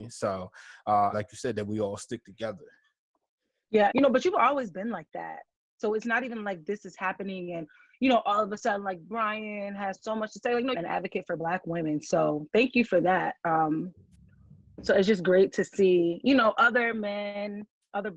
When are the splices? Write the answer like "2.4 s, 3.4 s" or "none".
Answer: 1.1 s, 3.9 s, 10.7 s